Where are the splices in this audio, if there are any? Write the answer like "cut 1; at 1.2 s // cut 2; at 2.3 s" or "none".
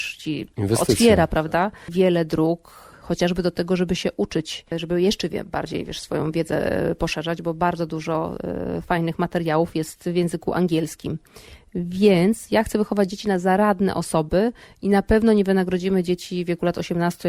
none